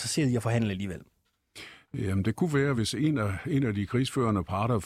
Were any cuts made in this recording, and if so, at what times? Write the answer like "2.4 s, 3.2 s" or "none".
none